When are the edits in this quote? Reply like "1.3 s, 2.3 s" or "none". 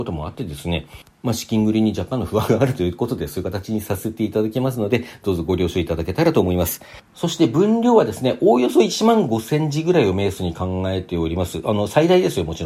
none